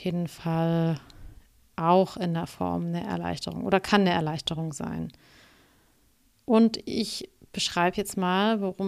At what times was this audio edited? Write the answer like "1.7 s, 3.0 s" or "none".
none